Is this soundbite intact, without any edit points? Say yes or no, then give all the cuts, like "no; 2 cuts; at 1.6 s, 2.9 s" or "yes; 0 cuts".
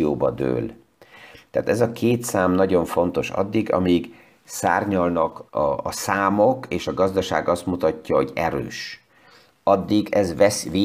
no; 1 cut; at 5.5 s